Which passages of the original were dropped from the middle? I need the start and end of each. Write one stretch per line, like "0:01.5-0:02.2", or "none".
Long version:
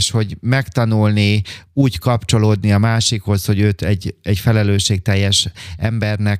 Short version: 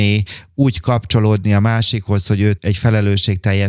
0:03.8-0:04.2